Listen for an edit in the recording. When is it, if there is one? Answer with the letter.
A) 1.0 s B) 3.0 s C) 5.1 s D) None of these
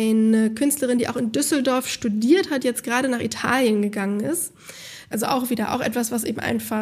C